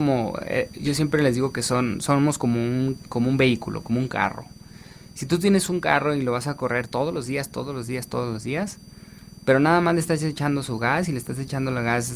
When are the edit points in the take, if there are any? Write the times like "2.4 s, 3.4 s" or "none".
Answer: none